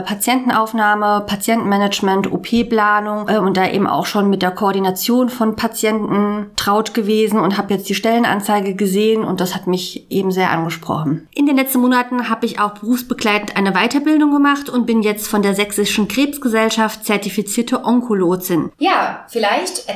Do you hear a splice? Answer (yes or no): yes